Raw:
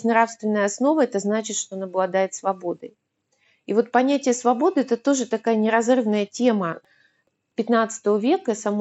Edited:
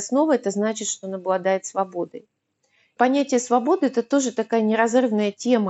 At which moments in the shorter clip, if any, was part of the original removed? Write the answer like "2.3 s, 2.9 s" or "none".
3.0 s